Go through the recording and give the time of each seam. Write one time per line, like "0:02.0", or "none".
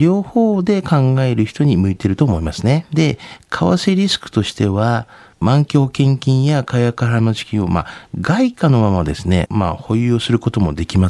0:02.8
0:09.5